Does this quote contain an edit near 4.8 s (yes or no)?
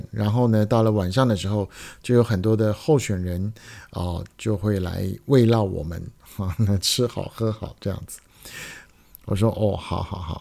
no